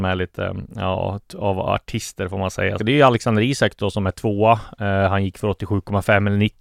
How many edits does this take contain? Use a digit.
1